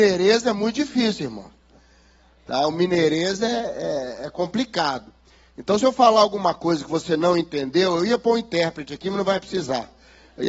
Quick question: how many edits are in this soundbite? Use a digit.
0